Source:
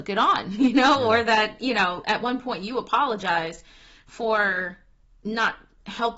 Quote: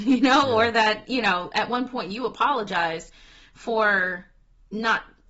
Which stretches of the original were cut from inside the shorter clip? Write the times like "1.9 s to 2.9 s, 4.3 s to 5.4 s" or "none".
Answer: none